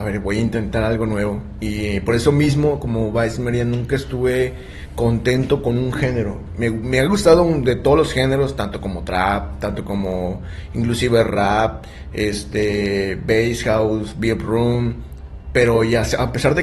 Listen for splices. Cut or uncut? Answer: uncut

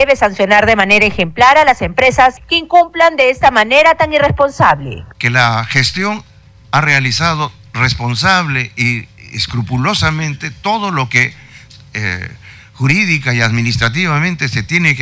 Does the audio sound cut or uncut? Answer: cut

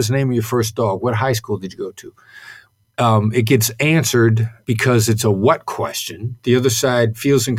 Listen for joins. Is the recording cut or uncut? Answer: uncut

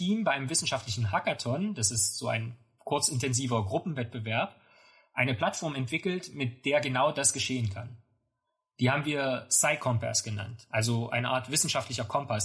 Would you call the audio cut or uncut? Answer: uncut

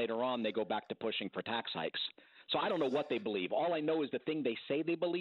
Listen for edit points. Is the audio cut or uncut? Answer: uncut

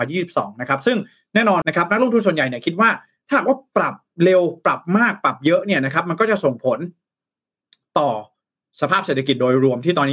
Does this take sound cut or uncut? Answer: cut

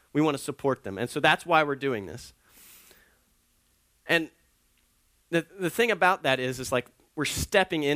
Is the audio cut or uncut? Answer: uncut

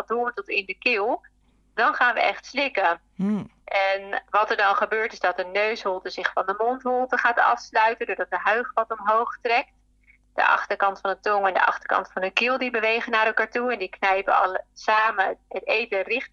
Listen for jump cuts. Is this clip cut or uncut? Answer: uncut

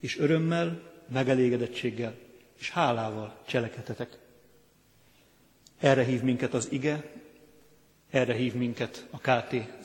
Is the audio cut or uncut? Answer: uncut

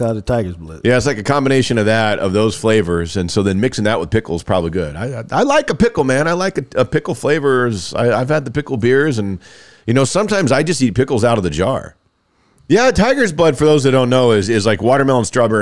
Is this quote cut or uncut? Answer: cut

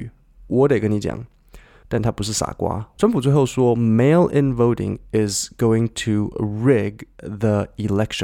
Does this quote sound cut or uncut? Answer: cut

